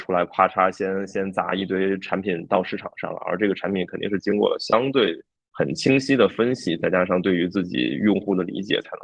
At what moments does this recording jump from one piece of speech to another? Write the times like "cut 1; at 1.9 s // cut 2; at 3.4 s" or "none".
none

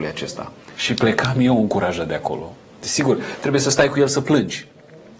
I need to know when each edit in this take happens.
cut 1; at 2.8 s

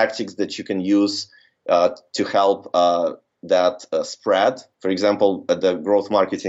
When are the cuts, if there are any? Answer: none

